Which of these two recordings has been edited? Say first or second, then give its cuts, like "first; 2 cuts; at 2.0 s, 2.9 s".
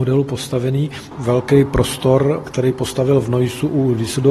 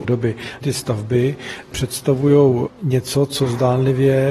first; 1 cut; at 1.1 s